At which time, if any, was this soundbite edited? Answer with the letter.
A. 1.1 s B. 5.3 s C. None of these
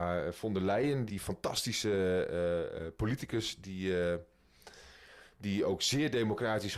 A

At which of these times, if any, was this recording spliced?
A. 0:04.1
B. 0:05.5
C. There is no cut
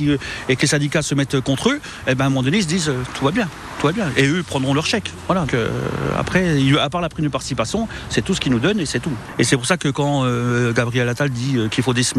B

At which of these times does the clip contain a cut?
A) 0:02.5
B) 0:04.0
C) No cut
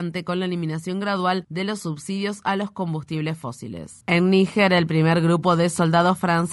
B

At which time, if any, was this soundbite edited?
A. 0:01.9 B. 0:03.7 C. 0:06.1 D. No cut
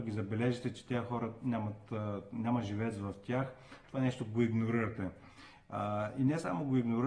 D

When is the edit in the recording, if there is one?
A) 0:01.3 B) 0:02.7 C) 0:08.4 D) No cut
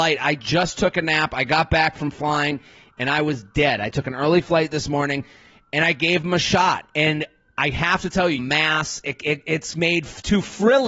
C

